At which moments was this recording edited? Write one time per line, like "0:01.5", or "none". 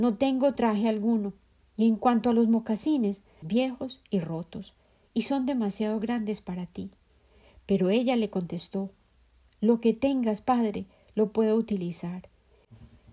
0:03.4